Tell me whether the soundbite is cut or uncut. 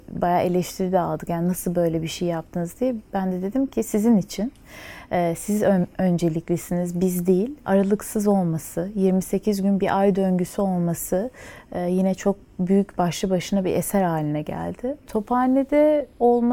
cut